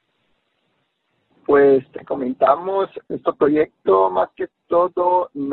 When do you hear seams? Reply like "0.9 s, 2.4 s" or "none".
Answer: 1.3 s, 3.0 s